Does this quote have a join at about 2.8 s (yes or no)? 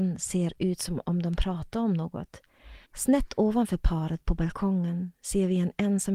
yes